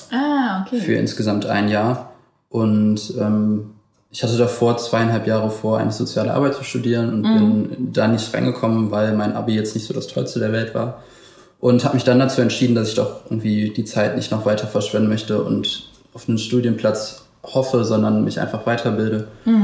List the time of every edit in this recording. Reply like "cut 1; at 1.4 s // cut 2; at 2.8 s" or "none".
none

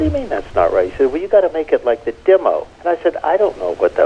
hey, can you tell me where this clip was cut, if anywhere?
cut 1; at 2.7 s

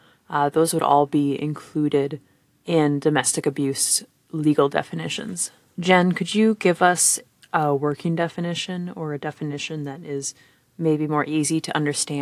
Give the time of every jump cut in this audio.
cut 1; at 5.8 s

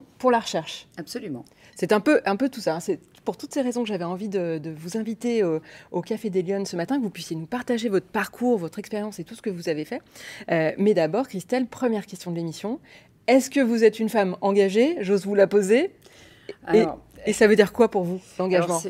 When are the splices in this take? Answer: none

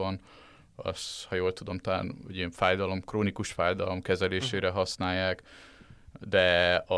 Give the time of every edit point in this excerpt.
none

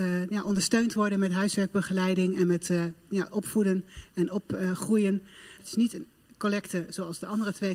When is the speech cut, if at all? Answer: cut 1; at 5.6 s

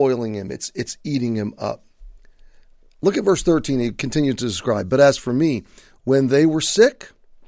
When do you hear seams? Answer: none

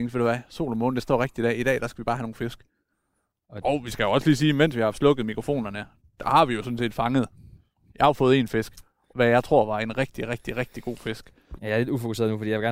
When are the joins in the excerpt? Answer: cut 1; at 3.6 s // cut 2; at 9.1 s // cut 3; at 11.6 s

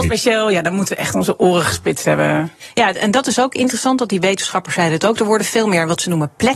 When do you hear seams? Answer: none

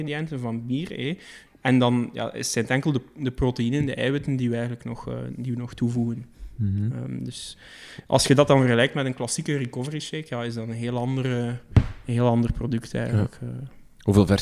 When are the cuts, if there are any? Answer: cut 1; at 1.5 s

